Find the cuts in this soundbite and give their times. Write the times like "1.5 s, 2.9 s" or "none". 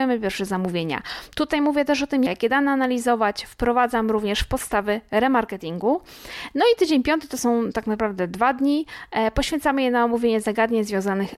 2.3 s